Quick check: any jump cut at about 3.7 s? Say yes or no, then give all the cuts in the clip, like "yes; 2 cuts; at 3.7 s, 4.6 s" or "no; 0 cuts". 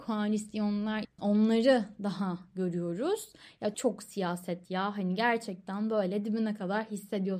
yes; 2 cuts; at 1.0 s, 3.7 s